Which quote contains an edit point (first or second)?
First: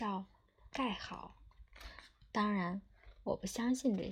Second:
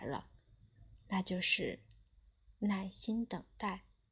first